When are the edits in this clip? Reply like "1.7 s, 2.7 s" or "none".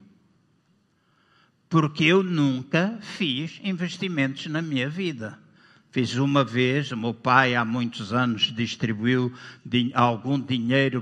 none